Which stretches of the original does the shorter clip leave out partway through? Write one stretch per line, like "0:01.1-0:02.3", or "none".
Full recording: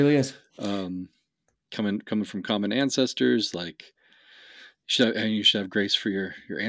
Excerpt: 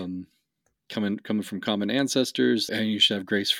0:03.5-0:05.1